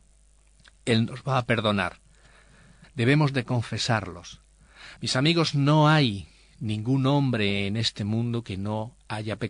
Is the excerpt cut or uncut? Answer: cut